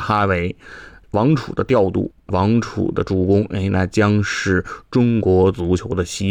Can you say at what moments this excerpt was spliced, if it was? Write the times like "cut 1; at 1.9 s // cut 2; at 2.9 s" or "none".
none